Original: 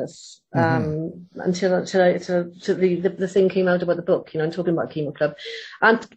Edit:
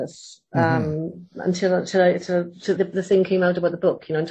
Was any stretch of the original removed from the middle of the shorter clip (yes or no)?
yes